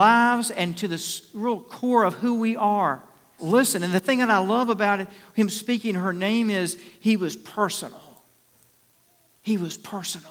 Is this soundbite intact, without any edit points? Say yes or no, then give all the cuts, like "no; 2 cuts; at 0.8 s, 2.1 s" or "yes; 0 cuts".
no; 1 cut; at 3.4 s